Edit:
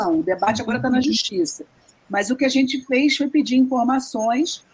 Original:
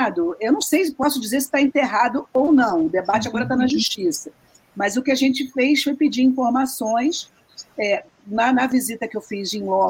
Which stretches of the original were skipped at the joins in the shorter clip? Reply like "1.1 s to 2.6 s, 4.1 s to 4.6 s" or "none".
none